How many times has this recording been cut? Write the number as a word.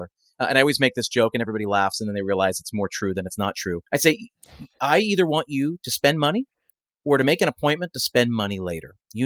one